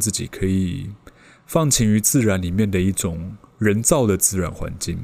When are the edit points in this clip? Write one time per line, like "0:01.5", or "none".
none